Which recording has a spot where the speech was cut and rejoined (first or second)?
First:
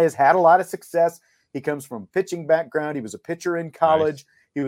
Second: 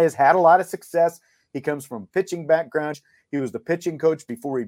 second